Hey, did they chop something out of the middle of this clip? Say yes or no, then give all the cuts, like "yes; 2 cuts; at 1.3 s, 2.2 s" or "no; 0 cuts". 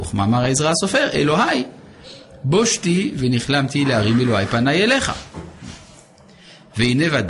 no; 0 cuts